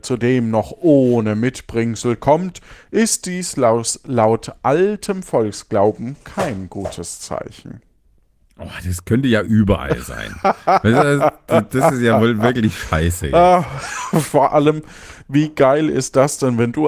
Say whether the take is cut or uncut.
uncut